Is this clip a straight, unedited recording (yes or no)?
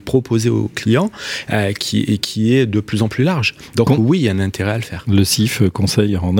yes